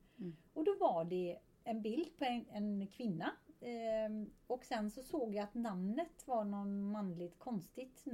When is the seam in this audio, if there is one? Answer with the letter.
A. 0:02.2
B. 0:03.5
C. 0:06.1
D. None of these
D